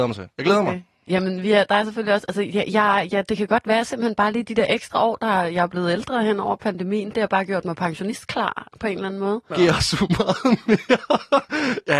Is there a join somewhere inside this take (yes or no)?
yes